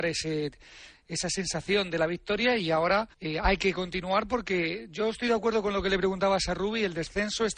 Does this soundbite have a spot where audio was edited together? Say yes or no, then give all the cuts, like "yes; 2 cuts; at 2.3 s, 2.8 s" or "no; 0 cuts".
yes; 1 cut; at 3.1 s